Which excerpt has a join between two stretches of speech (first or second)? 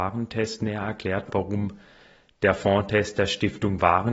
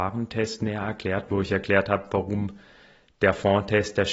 first